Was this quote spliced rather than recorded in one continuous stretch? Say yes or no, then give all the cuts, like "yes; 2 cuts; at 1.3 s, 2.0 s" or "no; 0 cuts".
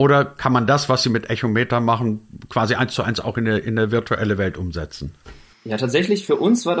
no; 0 cuts